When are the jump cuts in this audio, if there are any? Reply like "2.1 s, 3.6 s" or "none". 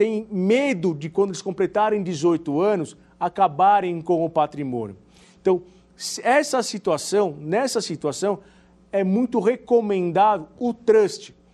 none